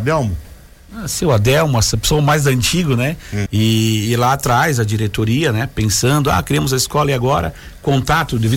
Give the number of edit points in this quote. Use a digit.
1